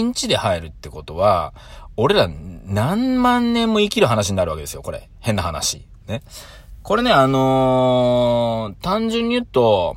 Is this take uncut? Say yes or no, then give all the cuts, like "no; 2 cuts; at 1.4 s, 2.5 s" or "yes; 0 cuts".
yes; 0 cuts